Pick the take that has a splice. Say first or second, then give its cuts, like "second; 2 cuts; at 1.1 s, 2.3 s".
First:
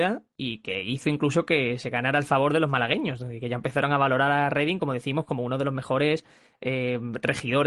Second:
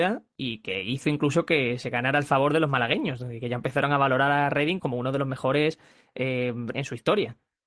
second; 2 cuts; at 4.8 s, 6.7 s